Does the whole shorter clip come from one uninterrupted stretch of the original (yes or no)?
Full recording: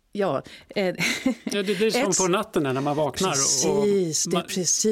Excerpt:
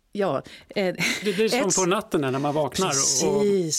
no